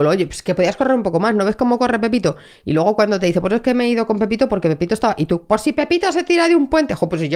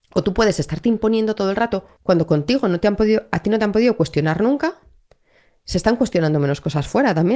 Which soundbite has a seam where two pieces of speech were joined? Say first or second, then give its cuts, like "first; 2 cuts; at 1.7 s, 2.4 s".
second; 1 cut; at 2.0 s